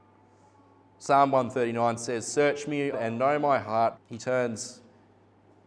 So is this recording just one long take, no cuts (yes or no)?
no